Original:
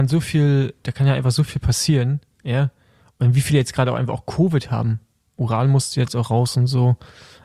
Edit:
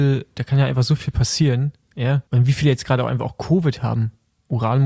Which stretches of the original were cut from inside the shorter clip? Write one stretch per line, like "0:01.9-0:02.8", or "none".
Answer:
0:02.8-0:03.2